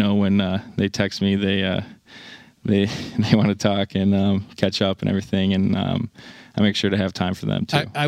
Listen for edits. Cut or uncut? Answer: uncut